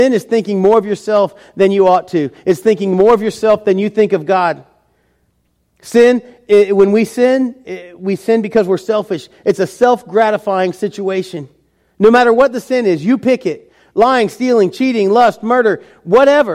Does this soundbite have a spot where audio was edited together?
no; 0 cuts

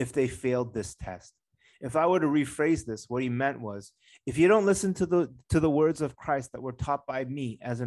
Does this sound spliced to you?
yes; 1 cut; at 1.7 s

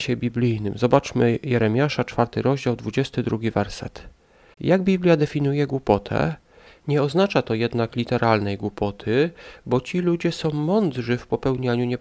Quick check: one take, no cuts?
no; 2 cuts; at 4.5 s, 6.7 s

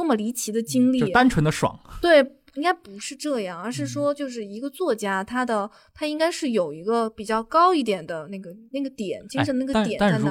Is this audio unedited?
yes; 0 cuts

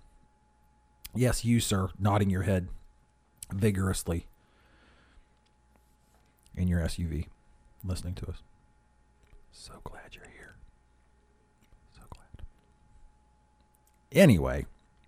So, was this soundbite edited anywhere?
no; 0 cuts

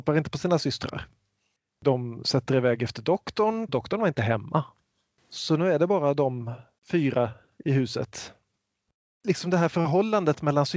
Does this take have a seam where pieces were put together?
yes; 1 cut; at 3.7 s

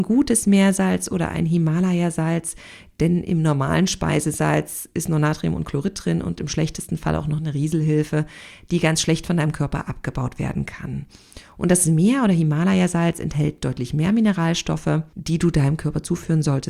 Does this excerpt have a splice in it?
no; 0 cuts

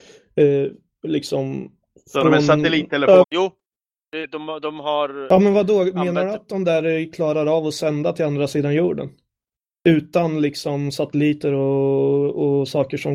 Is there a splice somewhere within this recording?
yes; 1 cut; at 3.2 s

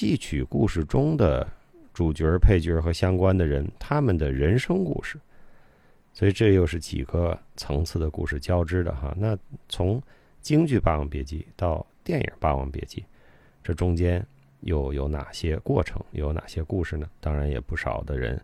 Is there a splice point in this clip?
yes; 1 cut; at 17.2 s

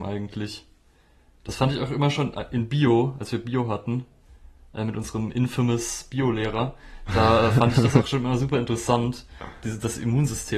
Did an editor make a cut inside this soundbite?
no; 0 cuts

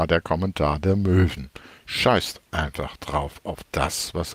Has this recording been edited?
no; 0 cuts

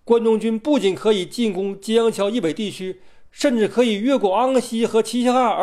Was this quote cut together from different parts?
no; 0 cuts

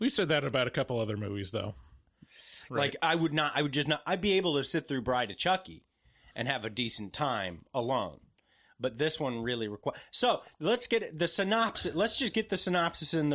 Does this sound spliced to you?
yes; 1 cut; at 2.7 s

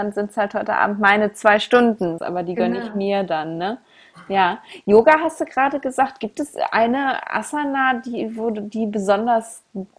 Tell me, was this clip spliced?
yes; 1 cut; at 2.2 s

